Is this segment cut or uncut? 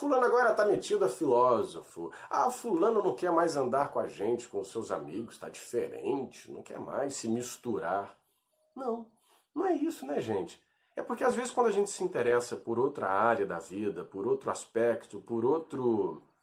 uncut